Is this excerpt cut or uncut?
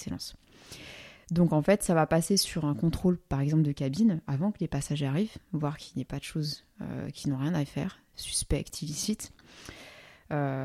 uncut